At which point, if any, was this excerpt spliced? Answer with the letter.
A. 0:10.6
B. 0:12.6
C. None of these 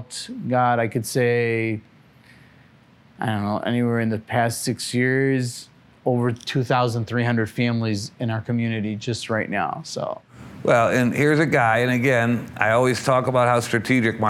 C